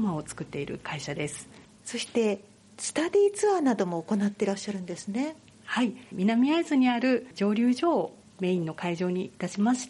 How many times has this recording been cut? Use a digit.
1